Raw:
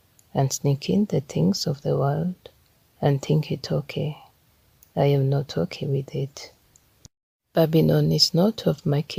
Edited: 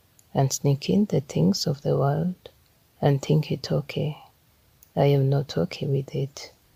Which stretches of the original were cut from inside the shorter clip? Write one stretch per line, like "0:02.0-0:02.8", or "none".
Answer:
none